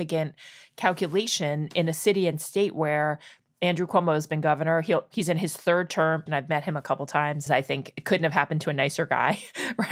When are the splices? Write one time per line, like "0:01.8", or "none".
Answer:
0:06.3
0:07.5